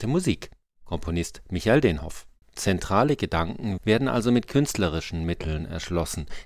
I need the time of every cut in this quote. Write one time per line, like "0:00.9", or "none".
0:02.4
0:03.8